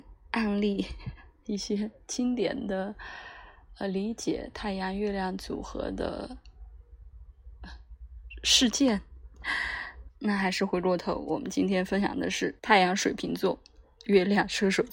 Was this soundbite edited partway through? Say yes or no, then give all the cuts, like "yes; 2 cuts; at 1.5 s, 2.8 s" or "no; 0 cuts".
yes; 2 cuts; at 10.1 s, 12.6 s